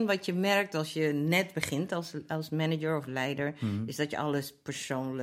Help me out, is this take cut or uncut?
uncut